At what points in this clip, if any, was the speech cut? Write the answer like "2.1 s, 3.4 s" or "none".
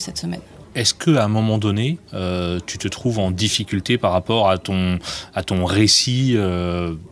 2.0 s